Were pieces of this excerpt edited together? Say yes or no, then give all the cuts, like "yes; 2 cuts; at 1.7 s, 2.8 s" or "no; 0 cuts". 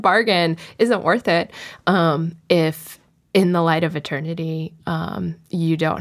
no; 0 cuts